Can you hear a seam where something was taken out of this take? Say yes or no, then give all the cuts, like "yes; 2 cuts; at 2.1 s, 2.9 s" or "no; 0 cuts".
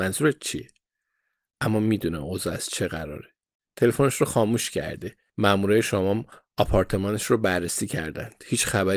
yes; 1 cut; at 3.6 s